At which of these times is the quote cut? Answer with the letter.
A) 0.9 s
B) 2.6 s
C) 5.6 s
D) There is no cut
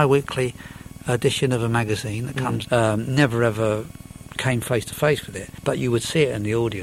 B